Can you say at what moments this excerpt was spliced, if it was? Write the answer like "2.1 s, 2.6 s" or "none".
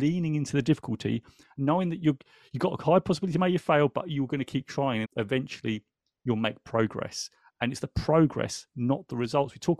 5.0 s